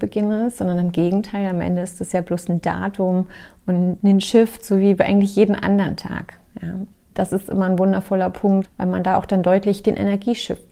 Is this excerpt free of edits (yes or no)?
no